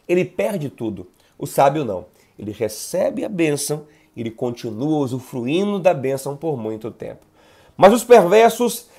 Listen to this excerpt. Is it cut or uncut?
uncut